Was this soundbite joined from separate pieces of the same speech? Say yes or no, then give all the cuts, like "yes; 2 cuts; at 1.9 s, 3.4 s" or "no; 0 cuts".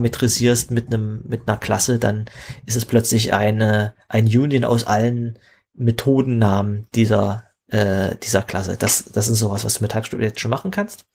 no; 0 cuts